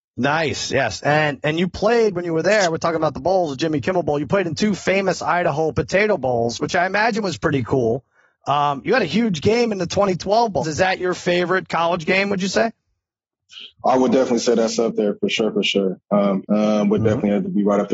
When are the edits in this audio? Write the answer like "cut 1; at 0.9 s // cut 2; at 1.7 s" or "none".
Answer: cut 1; at 10.6 s // cut 2; at 16.4 s